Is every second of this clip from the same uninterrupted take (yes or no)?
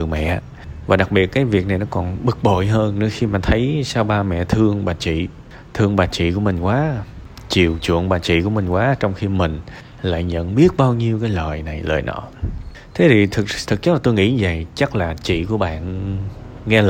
yes